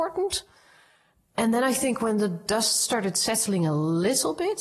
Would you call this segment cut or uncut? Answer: uncut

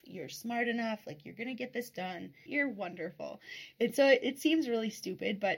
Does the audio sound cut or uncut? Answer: cut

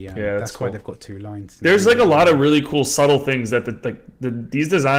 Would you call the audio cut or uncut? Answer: uncut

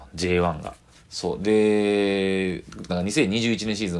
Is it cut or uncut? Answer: cut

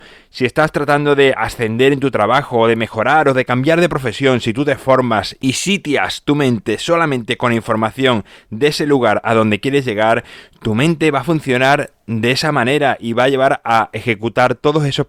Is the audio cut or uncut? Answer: uncut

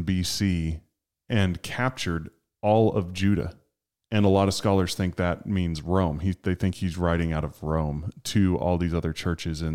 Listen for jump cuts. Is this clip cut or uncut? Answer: cut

